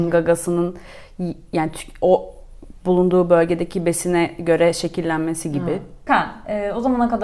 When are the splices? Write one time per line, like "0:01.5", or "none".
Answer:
0:06.1